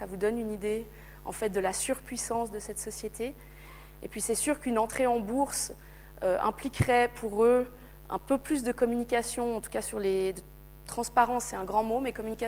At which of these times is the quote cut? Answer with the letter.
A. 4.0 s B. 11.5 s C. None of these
C